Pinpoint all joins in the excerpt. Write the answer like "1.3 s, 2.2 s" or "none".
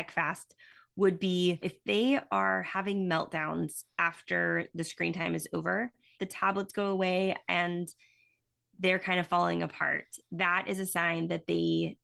6.2 s